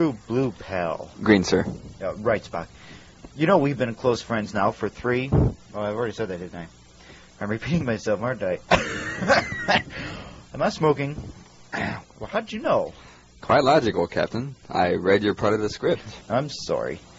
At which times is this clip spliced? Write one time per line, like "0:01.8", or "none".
0:12.0
0:16.2